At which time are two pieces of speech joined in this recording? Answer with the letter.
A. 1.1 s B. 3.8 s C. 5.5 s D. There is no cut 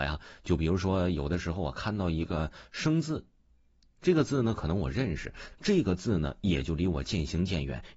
C